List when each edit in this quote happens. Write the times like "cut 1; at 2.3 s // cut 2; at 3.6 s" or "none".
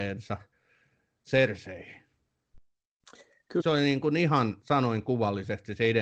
cut 1; at 3.6 s